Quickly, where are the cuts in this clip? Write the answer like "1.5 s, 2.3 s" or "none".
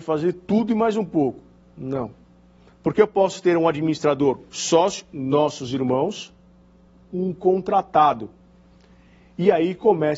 2.7 s, 7.0 s